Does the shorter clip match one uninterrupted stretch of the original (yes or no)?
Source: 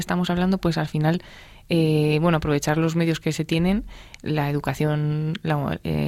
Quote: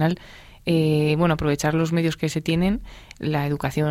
yes